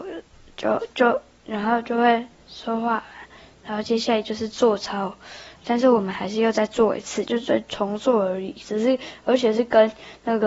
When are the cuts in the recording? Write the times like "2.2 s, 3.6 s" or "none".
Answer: 5.6 s, 7.3 s